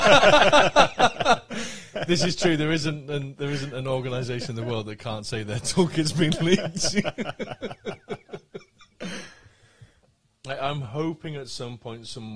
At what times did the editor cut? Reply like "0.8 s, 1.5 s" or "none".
none